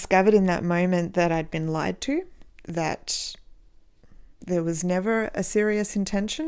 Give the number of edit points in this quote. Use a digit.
0